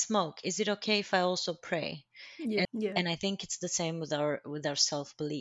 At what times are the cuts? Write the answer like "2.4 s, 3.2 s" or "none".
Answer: 2.6 s